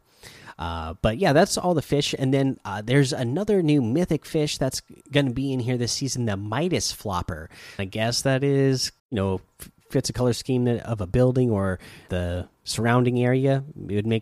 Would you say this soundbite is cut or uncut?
cut